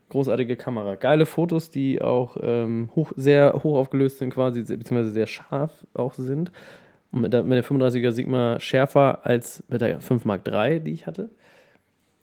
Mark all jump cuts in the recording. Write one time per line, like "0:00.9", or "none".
none